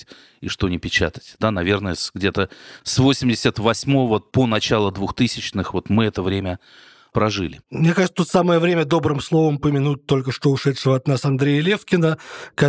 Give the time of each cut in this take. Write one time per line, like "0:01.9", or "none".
none